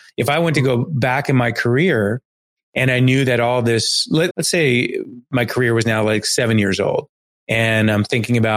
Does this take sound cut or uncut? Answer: cut